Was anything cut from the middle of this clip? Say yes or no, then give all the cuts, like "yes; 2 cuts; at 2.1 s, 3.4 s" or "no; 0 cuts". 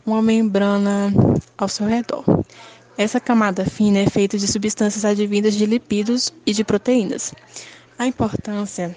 yes; 1 cut; at 7.9 s